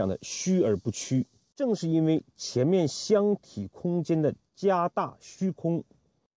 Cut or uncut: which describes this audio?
uncut